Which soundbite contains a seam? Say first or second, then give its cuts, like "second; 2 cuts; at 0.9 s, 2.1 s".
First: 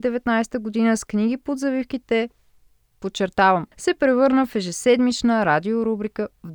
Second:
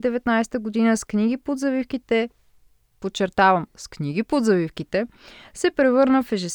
first; 1 cut; at 3.7 s